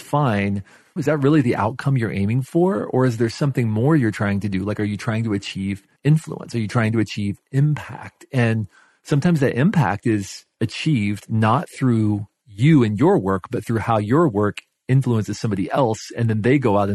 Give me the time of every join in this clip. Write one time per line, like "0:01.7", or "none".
0:01.0
0:06.0